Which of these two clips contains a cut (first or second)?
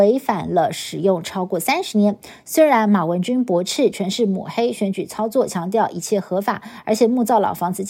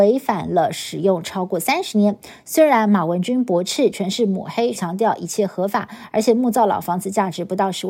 second